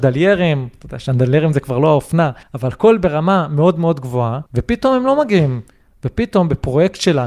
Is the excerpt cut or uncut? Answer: cut